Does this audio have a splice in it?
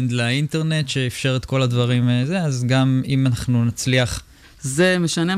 yes; 1 cut; at 4.4 s

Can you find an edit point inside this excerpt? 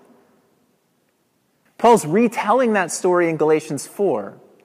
yes; 1 cut; at 1.7 s

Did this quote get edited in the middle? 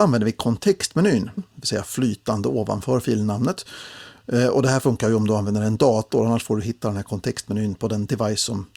yes; 1 cut; at 1.4 s

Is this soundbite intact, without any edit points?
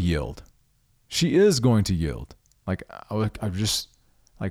no; 1 cut; at 2.6 s

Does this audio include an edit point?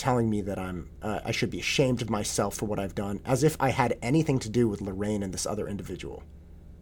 no; 0 cuts

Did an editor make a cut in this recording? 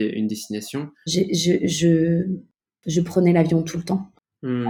yes; 1 cut; at 1.1 s

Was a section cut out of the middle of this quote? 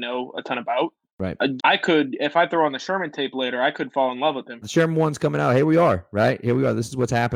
yes; 2 cuts; at 1.6 s, 4.6 s

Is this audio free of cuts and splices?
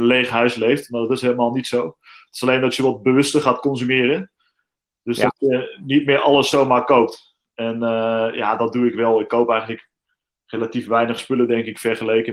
yes; 0 cuts

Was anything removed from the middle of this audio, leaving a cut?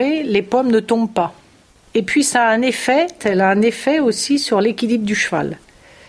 yes; 2 cuts; at 1.9 s, 3.2 s

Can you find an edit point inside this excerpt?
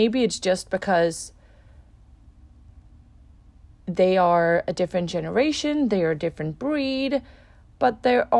no; 0 cuts

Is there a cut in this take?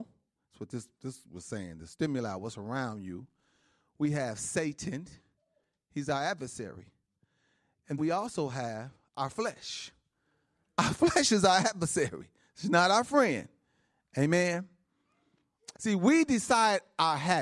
yes; 2 cuts; at 8.0 s, 15.7 s

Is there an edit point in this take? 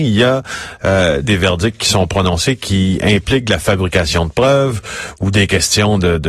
yes; 1 cut; at 1.2 s

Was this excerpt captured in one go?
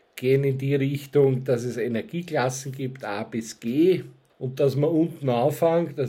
no; 1 cut; at 4.3 s

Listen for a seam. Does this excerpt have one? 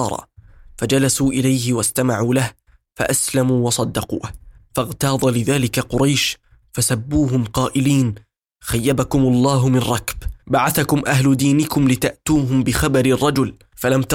no; 0 cuts

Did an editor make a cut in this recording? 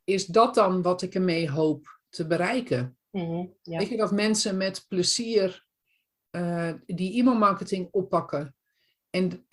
no; 0 cuts

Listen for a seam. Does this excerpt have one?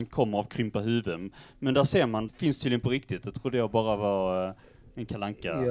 yes; 1 cut; at 2.3 s

